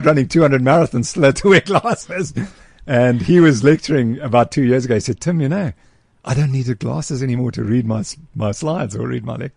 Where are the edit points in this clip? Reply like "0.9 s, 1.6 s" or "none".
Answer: none